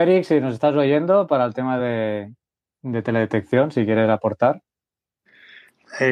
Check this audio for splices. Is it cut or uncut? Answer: uncut